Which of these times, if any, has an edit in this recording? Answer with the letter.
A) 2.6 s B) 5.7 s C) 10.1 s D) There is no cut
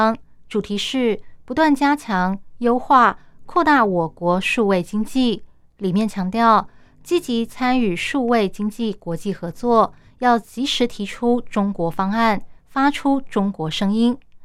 D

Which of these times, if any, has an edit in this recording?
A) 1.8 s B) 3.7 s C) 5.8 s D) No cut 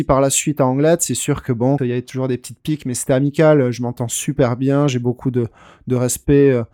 A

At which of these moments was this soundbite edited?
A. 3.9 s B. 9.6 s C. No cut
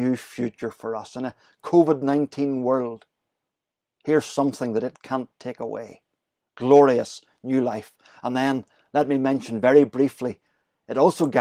C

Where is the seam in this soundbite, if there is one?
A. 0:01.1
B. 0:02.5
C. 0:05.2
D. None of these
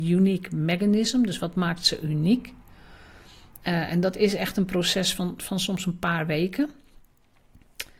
D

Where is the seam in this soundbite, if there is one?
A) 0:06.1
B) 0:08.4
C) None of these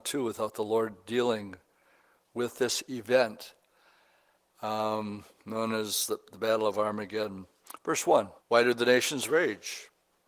B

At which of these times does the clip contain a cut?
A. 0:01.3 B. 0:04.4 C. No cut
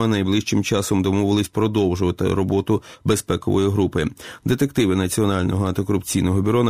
B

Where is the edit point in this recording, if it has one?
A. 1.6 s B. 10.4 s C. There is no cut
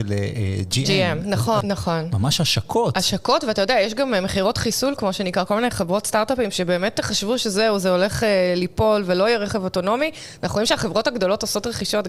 A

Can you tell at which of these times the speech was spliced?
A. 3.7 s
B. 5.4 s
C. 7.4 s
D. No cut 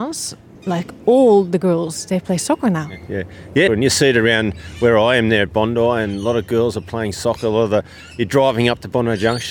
A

